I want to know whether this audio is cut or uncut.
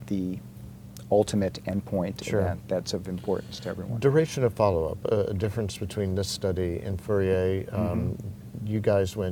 uncut